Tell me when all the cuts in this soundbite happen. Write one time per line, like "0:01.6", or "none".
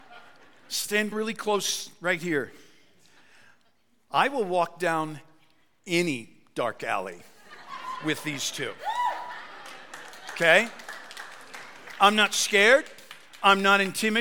none